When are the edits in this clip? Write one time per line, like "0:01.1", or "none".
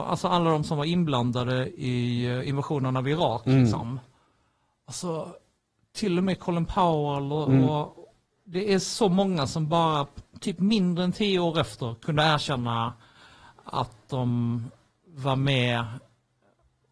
none